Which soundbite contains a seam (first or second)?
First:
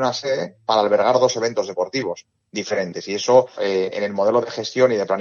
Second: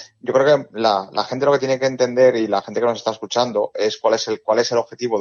first